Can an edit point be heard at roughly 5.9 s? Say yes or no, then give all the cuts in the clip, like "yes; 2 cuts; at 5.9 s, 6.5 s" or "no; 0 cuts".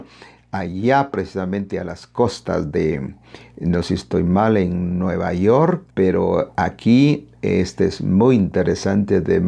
yes; 1 cut; at 5.9 s